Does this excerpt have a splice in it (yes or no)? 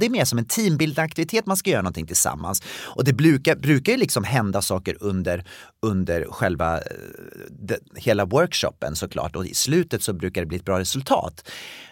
no